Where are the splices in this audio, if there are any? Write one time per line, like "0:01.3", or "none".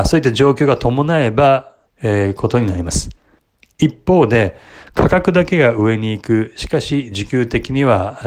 0:01.9